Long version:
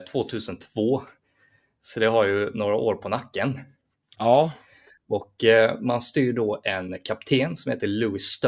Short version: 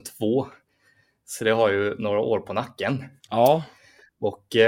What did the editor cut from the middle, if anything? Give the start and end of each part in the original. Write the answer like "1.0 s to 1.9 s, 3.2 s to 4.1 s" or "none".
3.7 s to 4.1 s